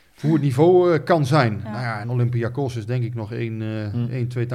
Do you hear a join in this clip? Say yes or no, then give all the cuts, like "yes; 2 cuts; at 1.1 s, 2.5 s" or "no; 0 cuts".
no; 0 cuts